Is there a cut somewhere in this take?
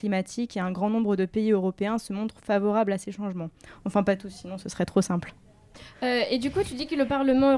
no; 0 cuts

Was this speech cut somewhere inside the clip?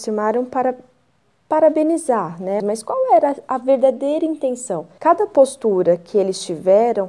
yes; 2 cuts; at 2.6 s, 5.0 s

